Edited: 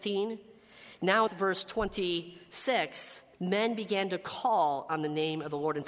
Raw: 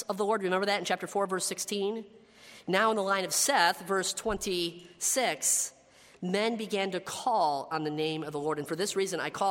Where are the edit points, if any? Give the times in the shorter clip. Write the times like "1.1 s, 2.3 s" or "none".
1.3 s, 3.3 s